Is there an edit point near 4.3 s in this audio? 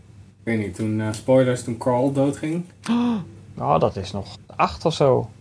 yes; 1 cut; at 4.3 s

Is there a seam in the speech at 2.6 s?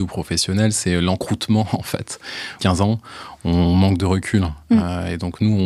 yes; 1 cut; at 2.6 s

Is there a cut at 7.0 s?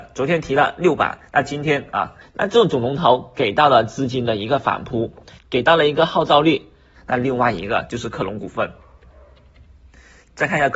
yes; 3 cuts; at 2.2 s, 5.4 s, 7.0 s

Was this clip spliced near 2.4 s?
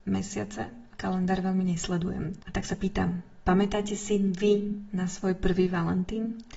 yes; 2 cuts; at 0.9 s, 2.4 s

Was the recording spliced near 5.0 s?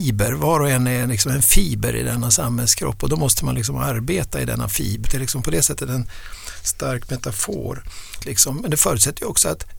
yes; 2 cuts; at 5.0 s, 8.2 s

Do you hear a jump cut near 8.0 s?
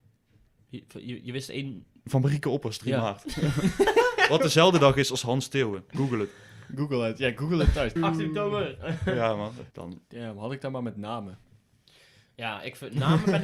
yes; 2 cuts; at 8.0 s, 9.7 s

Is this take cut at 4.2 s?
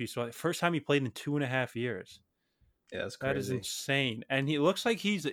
no; 0 cuts

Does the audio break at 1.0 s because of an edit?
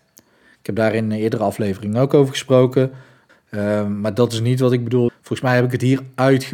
no; 2 cuts; at 3.3 s, 5.1 s

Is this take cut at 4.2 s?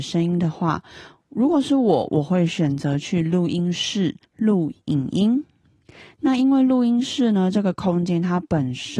yes; 1 cut; at 4.2 s

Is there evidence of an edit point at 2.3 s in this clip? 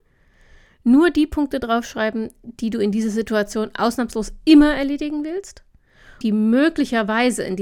no; 1 cut; at 6.2 s

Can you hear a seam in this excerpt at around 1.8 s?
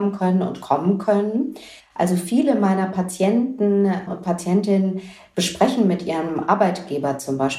yes; 1 cut; at 1.8 s

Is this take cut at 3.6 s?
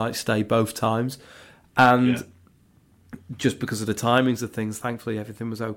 yes; 1 cut; at 3.6 s

